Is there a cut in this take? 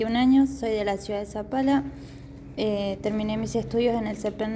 no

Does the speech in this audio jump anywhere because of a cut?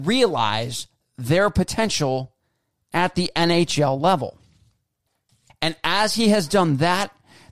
yes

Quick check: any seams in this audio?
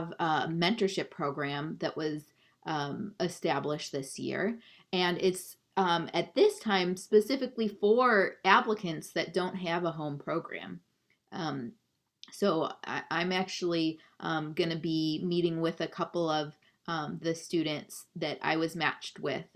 no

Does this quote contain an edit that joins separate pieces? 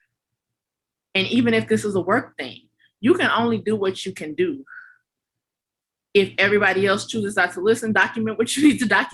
no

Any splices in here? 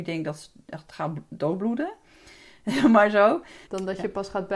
yes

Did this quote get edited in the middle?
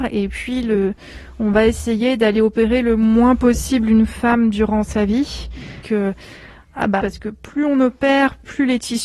yes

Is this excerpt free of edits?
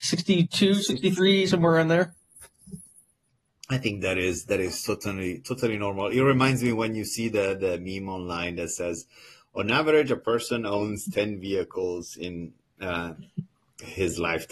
yes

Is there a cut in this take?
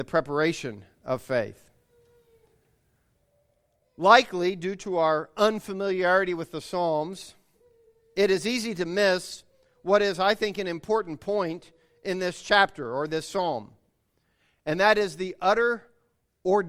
no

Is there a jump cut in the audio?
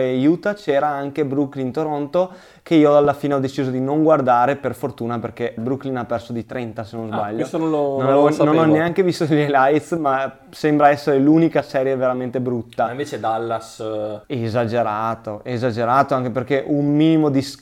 yes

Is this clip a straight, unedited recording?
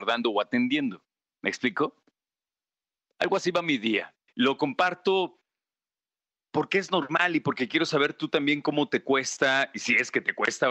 yes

